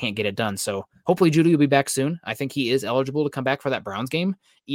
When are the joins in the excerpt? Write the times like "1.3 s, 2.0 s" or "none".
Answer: none